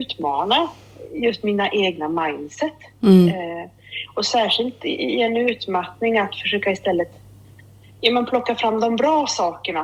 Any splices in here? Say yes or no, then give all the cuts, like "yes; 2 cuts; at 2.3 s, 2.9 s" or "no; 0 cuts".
no; 0 cuts